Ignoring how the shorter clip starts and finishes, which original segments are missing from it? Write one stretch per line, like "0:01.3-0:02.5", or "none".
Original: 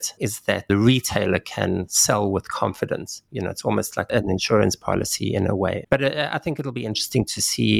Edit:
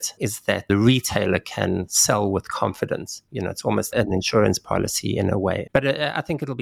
0:03.9-0:04.1